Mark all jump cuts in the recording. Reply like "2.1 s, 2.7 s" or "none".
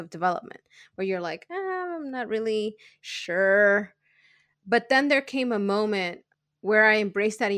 none